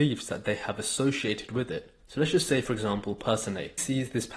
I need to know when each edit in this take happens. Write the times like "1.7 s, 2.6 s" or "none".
2.0 s